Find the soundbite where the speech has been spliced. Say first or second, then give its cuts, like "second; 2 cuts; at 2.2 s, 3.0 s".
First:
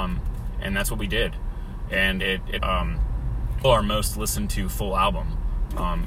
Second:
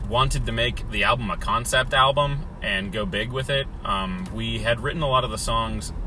first; 2 cuts; at 2.6 s, 3.6 s